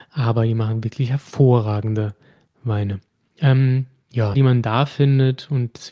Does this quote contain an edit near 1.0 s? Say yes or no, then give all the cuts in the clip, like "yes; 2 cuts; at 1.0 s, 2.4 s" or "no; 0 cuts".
no; 2 cuts; at 3.3 s, 4.3 s